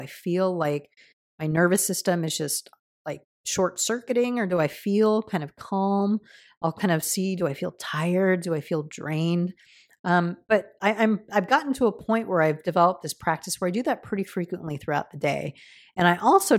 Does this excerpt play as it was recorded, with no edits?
yes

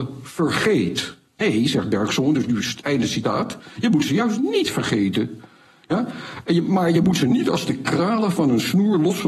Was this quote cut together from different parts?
no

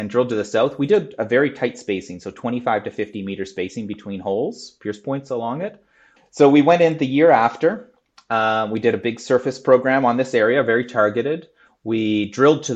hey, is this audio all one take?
no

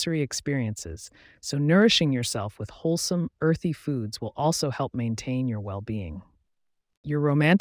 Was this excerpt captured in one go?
yes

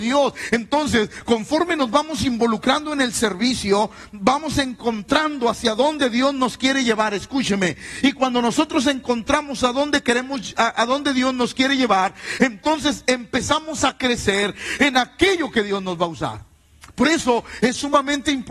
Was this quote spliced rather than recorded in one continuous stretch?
no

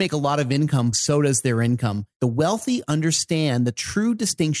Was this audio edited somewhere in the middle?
yes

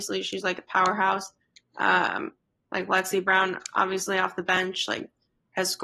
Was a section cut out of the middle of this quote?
no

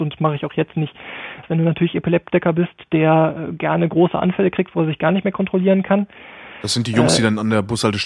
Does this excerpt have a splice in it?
yes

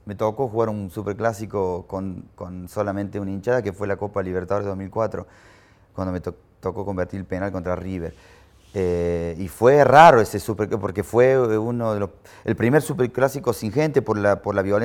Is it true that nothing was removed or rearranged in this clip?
yes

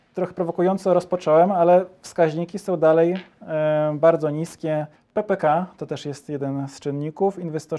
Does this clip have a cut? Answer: yes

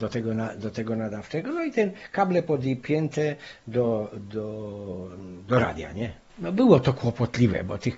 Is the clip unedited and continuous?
no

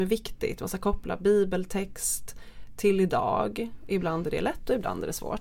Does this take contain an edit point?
no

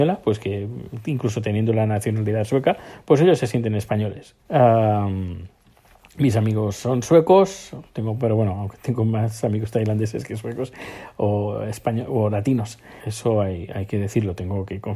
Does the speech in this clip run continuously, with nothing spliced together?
no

